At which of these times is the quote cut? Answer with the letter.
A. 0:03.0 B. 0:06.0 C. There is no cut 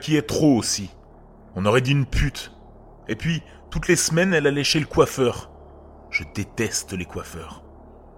C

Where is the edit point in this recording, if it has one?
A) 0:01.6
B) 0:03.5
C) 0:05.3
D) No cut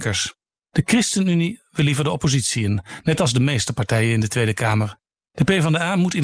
C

